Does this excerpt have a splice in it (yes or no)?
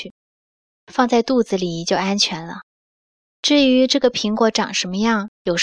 no